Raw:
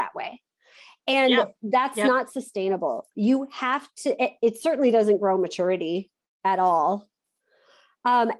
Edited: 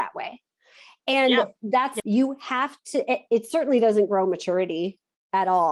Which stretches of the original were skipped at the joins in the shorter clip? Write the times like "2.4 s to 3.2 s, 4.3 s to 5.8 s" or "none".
2.0 s to 3.1 s